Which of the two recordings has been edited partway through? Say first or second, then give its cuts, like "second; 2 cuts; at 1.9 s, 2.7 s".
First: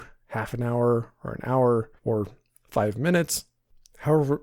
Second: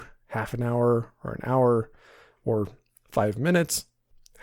first; 1 cut; at 2.0 s